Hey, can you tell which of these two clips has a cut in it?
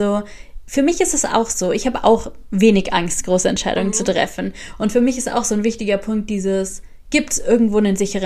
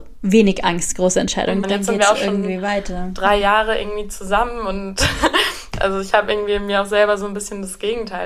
second; 1 cut; at 1.6 s

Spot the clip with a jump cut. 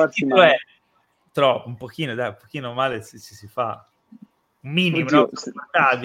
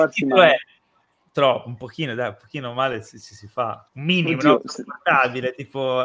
second; 1 cut; at 3.9 s

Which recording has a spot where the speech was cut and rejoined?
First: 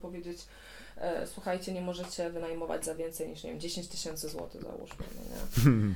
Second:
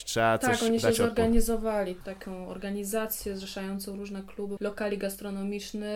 second; 2 cuts; at 2.0 s, 4.6 s

